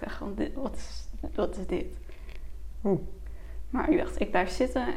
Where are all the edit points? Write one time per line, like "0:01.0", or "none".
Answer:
0:02.7